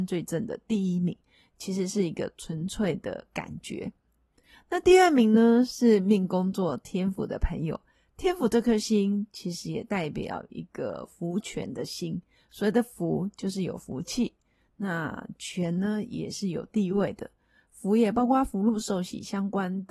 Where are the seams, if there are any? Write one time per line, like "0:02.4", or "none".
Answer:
none